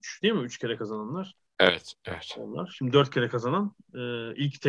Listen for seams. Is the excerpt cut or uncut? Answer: uncut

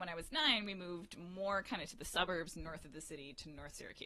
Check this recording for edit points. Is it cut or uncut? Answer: uncut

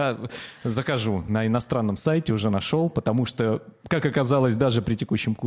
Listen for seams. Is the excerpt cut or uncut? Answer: uncut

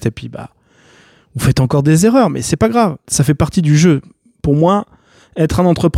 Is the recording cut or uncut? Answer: cut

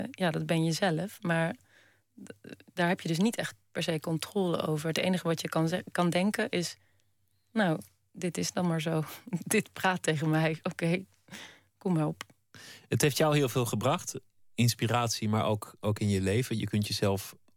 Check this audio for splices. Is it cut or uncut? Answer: uncut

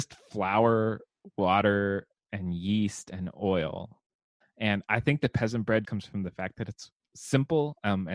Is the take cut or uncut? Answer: cut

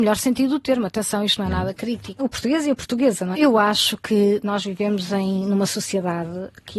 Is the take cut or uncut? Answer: cut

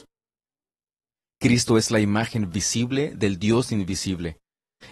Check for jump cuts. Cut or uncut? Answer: uncut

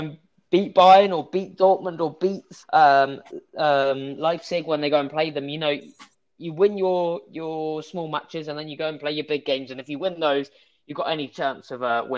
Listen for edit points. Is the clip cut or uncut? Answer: cut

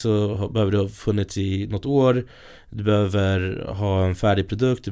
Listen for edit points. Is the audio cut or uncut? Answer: uncut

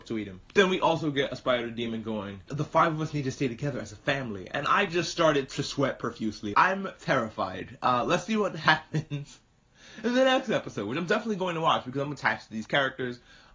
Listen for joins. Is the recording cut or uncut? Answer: cut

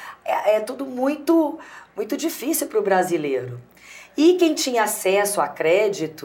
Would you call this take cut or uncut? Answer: uncut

